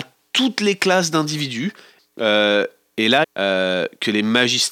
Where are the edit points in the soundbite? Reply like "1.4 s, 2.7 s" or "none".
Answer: 2.0 s, 3.2 s